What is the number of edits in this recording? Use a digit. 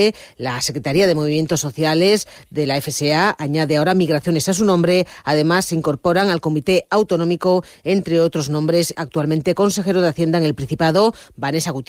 1